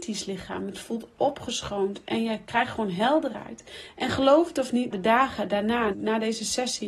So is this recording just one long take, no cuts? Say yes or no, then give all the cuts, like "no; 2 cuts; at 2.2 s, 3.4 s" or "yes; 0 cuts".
no; 2 cuts; at 4.9 s, 5.9 s